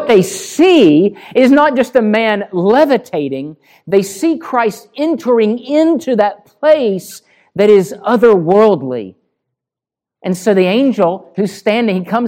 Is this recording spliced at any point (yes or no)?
no